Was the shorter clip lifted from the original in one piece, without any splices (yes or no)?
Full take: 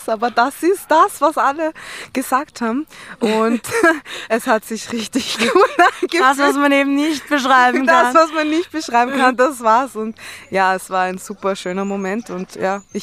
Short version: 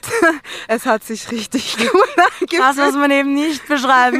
yes